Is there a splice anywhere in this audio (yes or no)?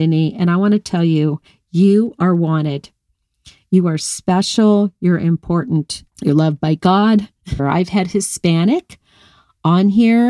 yes